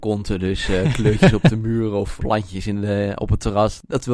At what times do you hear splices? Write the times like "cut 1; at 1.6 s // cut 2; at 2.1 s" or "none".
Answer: cut 1; at 2.2 s